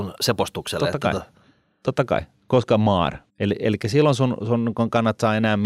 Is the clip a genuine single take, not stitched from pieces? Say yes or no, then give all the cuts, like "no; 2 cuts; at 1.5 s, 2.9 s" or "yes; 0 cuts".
no; 1 cut; at 3.3 s